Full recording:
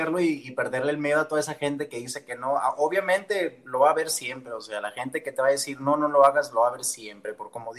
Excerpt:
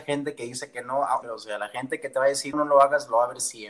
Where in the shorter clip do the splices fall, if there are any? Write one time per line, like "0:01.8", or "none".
0:01.2
0:02.5